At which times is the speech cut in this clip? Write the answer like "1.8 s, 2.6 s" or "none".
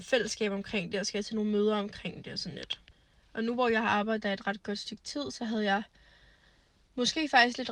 none